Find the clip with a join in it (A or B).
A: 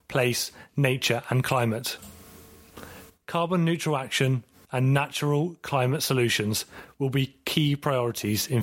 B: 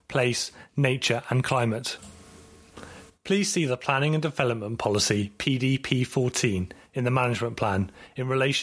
A